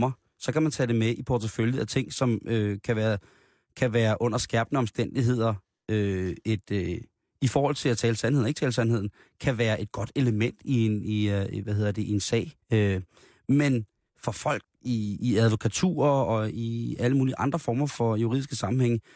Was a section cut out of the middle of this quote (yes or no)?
yes